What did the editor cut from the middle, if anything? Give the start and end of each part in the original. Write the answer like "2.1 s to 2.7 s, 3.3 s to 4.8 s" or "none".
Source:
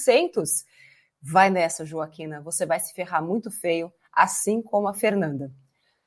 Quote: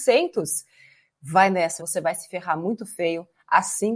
1.8 s to 2.4 s